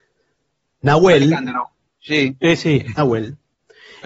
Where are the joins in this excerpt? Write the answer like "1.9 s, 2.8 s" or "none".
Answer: 1.9 s, 3.0 s